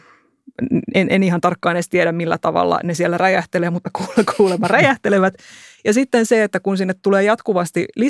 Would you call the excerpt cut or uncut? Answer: uncut